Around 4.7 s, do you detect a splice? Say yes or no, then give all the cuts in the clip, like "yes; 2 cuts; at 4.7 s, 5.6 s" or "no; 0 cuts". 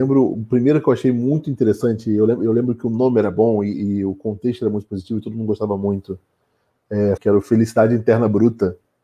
no; 1 cut; at 7.2 s